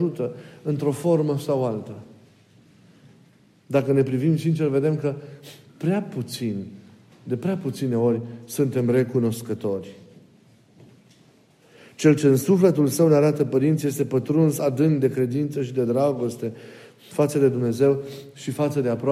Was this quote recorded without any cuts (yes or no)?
yes